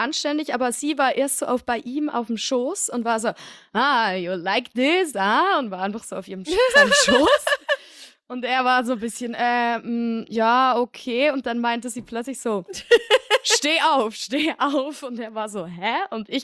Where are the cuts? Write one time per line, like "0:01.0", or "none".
0:05.1